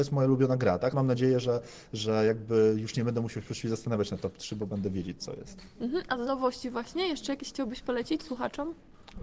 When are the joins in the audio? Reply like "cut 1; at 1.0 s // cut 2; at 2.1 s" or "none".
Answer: cut 1; at 0.9 s